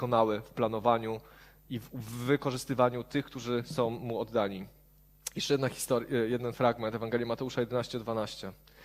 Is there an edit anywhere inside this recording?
no; 0 cuts

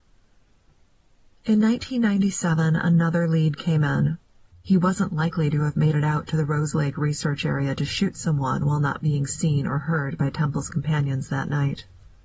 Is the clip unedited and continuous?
no; 1 cut; at 4.5 s

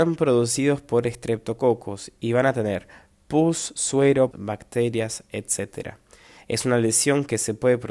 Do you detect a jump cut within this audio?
yes; 2 cuts; at 4.3 s, 6.4 s

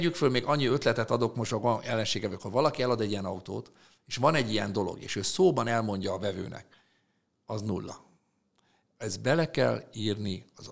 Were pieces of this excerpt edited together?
no; 0 cuts

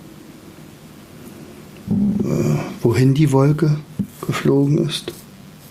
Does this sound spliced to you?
yes; 1 cut; at 2.8 s

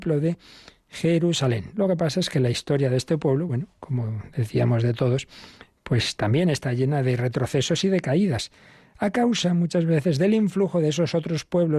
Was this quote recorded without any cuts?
yes; 0 cuts

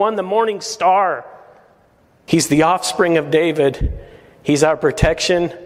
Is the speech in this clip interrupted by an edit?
no; 0 cuts

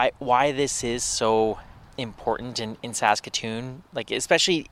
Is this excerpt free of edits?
yes; 0 cuts

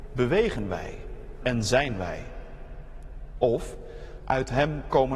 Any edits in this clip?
yes; 1 cut; at 4.2 s

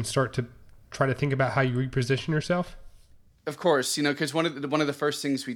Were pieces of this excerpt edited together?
no; 0 cuts

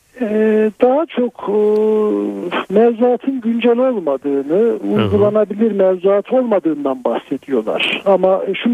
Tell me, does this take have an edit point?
no; 0 cuts

